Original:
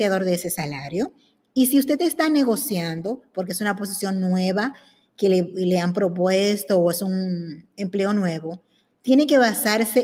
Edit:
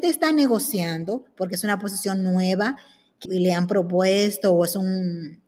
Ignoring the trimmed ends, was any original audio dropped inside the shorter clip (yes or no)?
yes